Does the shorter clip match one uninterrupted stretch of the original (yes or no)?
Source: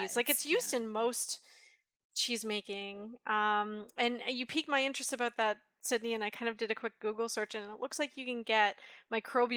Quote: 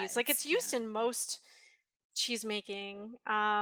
yes